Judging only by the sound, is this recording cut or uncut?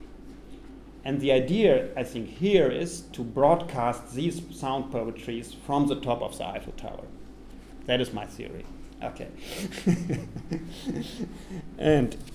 uncut